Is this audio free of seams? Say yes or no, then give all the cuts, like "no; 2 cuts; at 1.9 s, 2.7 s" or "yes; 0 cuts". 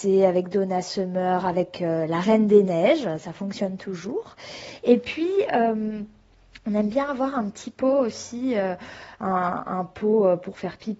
yes; 0 cuts